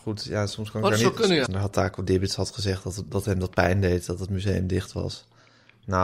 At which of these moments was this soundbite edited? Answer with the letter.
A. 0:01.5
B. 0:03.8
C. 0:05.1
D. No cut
A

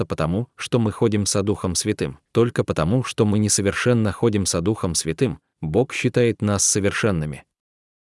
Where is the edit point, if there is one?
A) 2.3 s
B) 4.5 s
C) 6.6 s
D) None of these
A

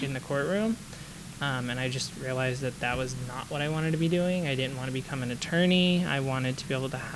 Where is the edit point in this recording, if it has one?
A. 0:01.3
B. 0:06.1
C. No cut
C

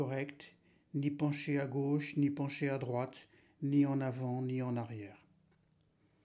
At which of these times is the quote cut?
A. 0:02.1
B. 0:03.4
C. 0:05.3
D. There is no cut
D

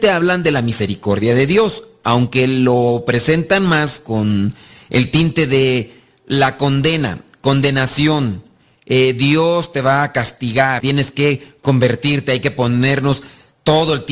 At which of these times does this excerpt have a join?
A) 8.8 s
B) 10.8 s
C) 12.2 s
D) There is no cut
B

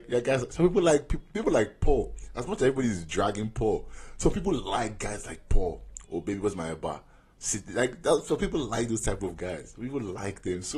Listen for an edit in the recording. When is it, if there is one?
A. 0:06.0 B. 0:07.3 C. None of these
A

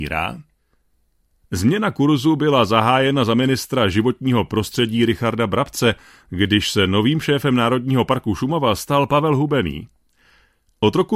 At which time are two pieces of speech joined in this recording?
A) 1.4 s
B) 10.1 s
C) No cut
A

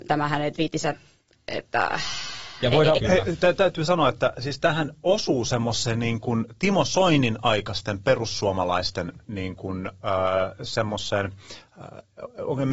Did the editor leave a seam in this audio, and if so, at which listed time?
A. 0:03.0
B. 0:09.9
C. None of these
A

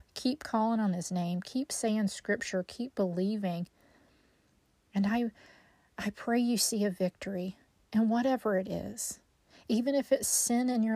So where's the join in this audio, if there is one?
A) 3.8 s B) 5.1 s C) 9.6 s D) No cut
D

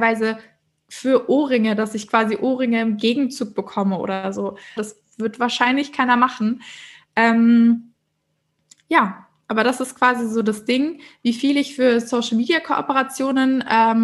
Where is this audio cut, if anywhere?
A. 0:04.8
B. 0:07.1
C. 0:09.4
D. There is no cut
A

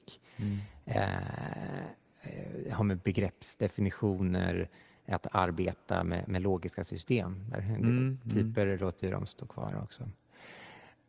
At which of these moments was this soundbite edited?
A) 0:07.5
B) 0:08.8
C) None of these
A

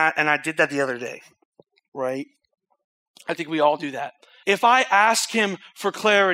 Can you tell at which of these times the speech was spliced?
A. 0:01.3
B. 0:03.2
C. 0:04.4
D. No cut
C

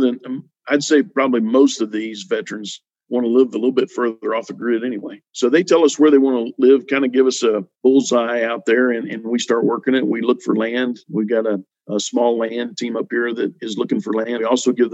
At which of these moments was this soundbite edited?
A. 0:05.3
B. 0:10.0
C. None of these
A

